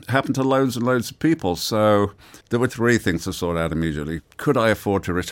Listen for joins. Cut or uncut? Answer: cut